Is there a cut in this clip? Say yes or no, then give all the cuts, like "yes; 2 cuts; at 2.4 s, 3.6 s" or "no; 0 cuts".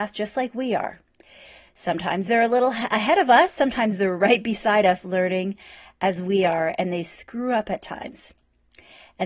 no; 0 cuts